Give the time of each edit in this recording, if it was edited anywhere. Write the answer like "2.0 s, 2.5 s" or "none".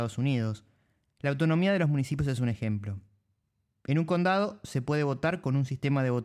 none